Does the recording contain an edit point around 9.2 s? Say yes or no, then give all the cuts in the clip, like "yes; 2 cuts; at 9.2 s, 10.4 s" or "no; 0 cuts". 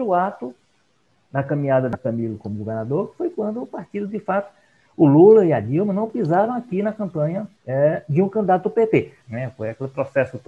yes; 2 cuts; at 7.6 s, 9.2 s